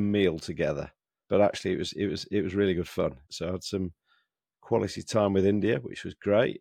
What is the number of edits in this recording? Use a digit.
2